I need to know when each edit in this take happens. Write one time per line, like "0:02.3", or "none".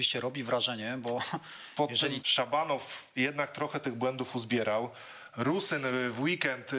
0:02.2